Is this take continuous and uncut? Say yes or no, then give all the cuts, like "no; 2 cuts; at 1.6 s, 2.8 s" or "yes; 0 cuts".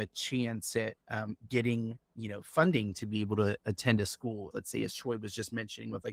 no; 2 cuts; at 1.0 s, 4.5 s